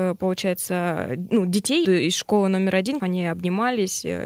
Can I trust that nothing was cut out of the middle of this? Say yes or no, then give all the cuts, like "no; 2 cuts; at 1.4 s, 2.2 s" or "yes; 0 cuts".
no; 2 cuts; at 1.8 s, 3.0 s